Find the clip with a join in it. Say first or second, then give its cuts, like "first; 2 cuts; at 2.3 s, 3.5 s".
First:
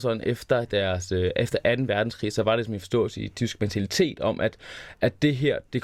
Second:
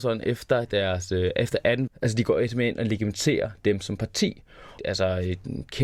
second; 2 cuts; at 1.9 s, 4.8 s